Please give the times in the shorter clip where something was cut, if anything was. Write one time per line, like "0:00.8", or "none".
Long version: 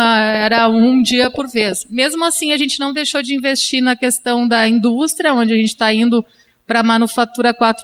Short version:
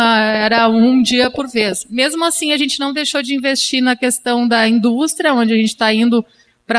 none